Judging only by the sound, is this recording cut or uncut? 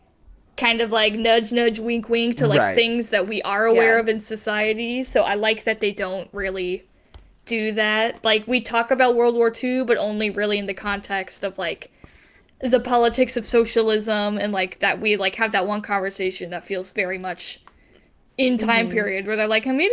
uncut